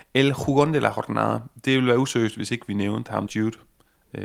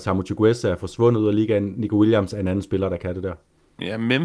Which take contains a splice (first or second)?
first